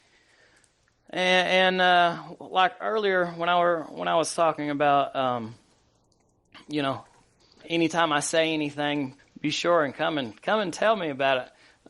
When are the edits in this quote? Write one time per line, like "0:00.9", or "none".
0:07.6
0:09.2